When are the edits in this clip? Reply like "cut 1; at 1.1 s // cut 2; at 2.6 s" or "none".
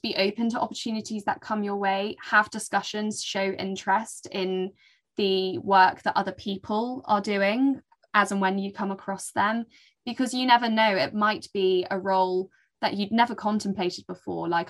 none